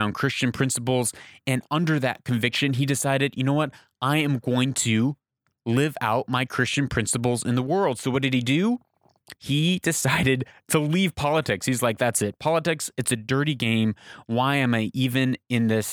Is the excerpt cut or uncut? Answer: cut